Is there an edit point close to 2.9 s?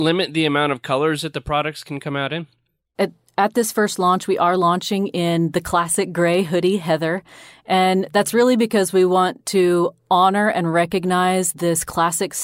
yes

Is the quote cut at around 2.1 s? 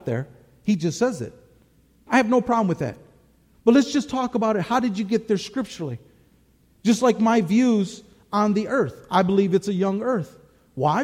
yes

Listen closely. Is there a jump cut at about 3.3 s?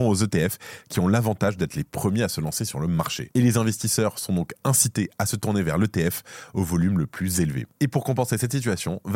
no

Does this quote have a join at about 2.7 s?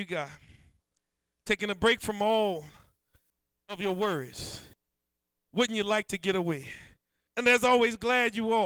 no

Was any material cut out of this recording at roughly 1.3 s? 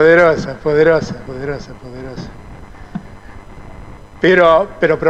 yes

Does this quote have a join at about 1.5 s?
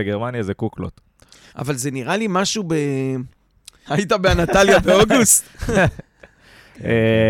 yes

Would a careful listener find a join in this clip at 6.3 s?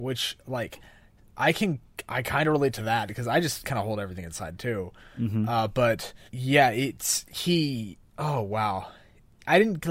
yes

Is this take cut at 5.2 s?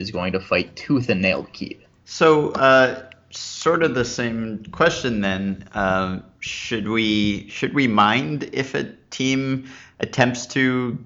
no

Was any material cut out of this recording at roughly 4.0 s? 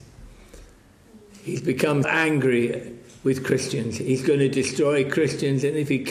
no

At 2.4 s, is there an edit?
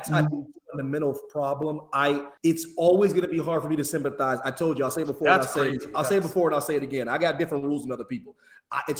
yes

